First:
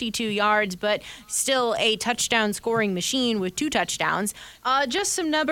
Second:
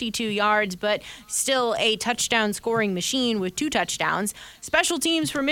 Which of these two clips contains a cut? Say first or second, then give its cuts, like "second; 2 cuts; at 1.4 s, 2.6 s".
first; 1 cut; at 4.6 s